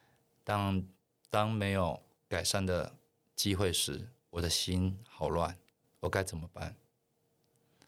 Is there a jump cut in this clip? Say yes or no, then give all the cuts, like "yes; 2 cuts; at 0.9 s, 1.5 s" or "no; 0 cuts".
yes; 1 cut; at 5.8 s